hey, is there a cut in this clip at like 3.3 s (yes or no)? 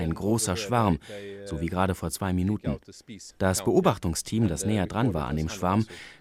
yes